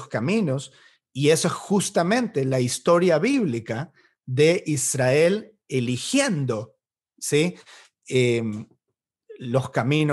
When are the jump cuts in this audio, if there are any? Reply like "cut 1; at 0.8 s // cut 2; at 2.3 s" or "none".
none